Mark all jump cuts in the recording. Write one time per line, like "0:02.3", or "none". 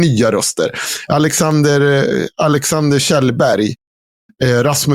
none